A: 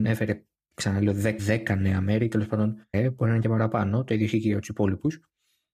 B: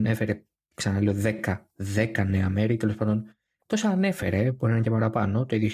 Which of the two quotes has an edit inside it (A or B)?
A